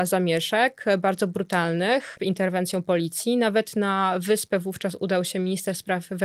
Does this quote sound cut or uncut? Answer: cut